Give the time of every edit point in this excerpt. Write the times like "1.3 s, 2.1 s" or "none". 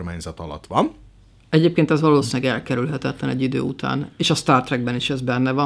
none